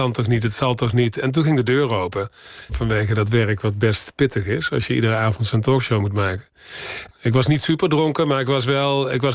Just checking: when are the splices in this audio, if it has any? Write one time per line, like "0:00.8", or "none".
0:02.7
0:07.1